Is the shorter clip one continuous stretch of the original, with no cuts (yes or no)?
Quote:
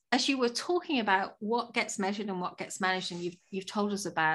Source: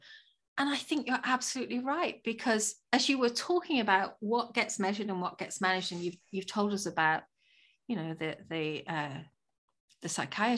yes